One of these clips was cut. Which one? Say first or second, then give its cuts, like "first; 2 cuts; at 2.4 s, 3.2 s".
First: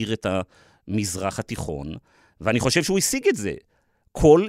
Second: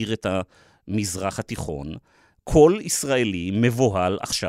second; 1 cut; at 2.3 s